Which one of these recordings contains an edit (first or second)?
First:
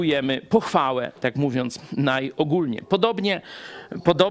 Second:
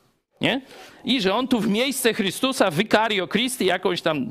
first